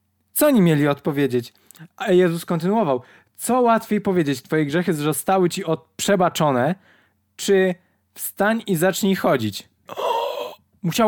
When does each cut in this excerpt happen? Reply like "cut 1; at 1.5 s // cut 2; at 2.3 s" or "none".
cut 1; at 9.9 s